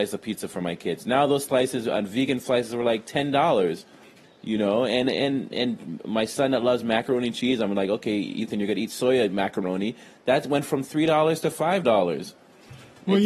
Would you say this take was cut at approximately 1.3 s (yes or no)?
no